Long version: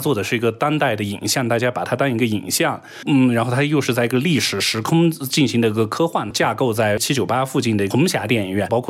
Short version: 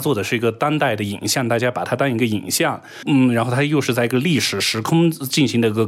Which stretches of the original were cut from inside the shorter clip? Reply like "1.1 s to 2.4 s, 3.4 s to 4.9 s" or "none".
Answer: none